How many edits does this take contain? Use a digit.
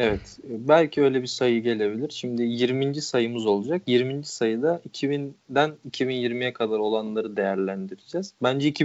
0